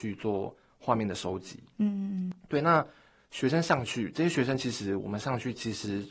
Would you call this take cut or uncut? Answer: uncut